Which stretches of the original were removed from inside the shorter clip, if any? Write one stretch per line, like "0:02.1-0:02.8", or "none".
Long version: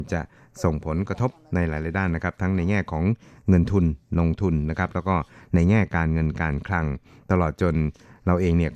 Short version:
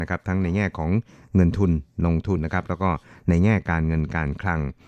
0:04.5-0:04.6